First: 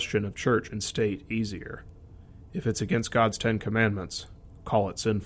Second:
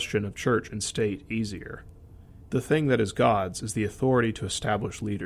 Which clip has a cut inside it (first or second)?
second